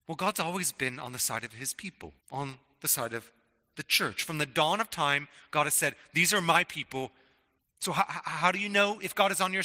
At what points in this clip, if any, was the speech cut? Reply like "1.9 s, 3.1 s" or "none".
2.2 s, 7.6 s